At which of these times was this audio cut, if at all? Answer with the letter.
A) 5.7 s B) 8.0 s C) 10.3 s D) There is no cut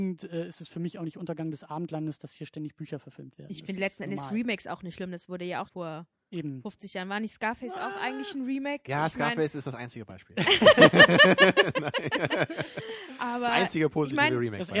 A